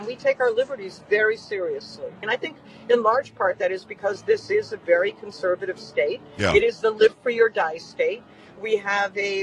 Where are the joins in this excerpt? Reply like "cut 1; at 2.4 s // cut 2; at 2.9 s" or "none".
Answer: cut 1; at 2.2 s